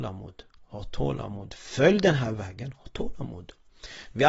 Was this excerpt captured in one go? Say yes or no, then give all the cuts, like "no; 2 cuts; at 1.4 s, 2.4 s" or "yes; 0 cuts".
yes; 0 cuts